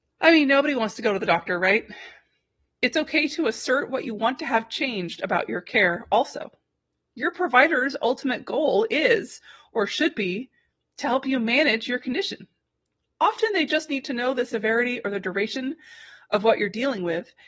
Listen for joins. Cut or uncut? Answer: cut